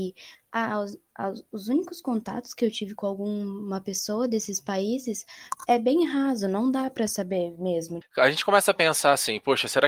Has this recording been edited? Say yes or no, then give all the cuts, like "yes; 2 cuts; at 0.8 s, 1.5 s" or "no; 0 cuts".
yes; 1 cut; at 8.0 s